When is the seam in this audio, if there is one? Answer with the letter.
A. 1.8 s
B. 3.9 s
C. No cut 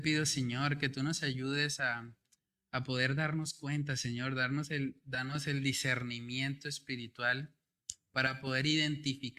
C